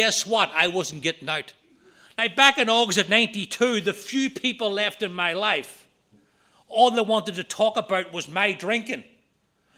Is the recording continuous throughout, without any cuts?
no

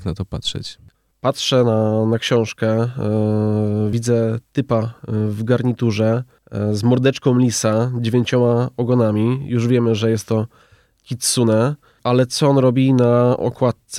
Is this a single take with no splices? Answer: yes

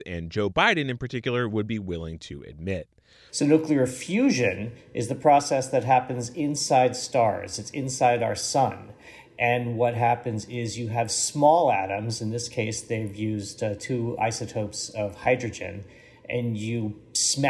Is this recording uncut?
no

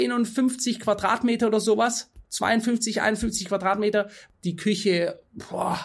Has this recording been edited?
yes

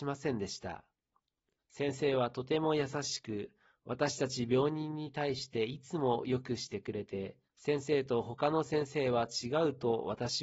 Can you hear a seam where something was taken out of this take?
yes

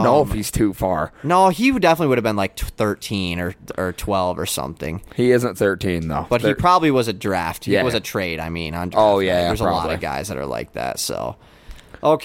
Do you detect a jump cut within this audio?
yes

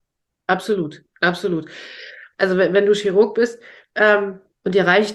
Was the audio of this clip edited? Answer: yes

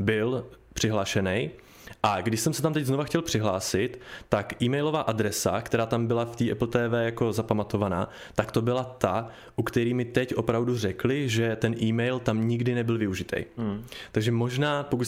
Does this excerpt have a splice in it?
no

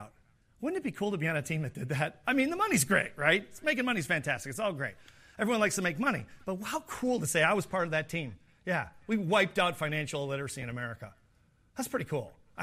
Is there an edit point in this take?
no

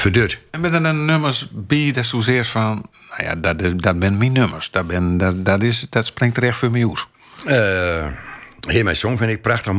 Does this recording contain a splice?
no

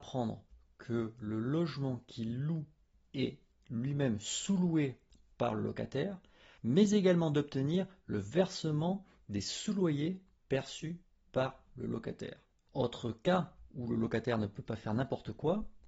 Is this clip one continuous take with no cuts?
no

